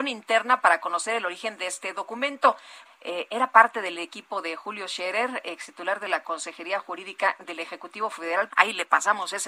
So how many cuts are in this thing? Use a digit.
2